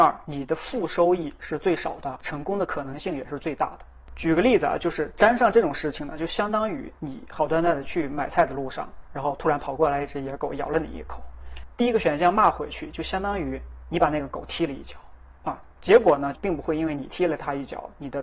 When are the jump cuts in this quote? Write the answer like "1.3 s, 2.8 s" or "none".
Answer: 16.3 s